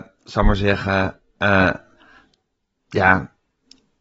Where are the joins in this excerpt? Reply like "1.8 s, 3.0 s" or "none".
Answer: none